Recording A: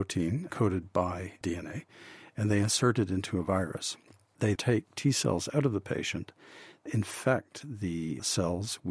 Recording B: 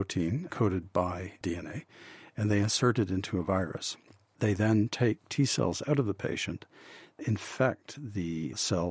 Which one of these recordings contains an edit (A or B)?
A